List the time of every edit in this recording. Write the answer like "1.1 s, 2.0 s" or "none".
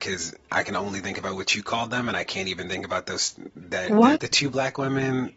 4.1 s